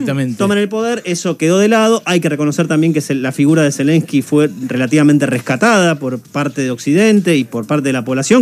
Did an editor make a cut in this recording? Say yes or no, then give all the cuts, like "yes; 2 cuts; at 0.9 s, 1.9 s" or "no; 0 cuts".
no; 0 cuts